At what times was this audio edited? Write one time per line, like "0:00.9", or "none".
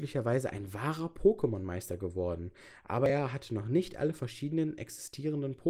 none